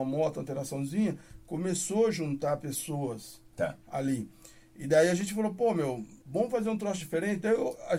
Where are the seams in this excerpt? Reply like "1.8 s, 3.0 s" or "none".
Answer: 6.2 s